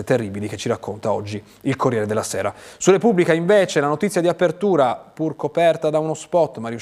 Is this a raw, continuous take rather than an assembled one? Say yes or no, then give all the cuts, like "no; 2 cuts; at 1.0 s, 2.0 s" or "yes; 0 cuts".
yes; 0 cuts